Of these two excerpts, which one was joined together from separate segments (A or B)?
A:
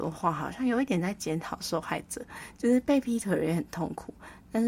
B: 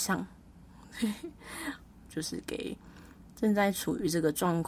B